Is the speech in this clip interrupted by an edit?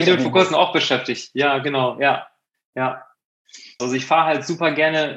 yes; 1 cut; at 3.8 s

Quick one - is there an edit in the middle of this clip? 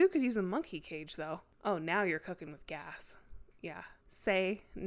no; 0 cuts

